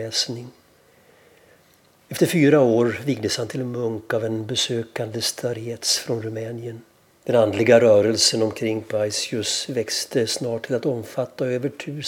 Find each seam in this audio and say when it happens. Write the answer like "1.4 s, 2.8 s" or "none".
7.1 s